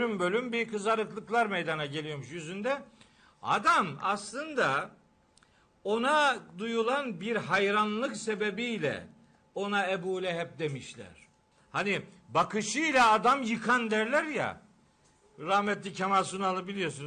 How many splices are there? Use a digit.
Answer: 1